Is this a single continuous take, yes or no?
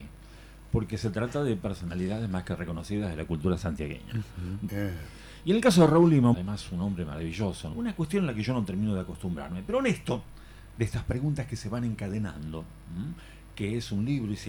no